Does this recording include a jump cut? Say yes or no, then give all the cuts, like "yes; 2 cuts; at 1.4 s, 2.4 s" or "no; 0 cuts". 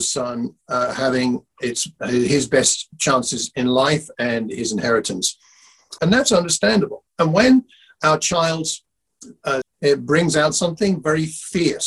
yes; 2 cuts; at 6.0 s, 9.6 s